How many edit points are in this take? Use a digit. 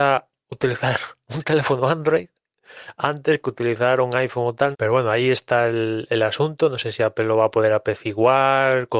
1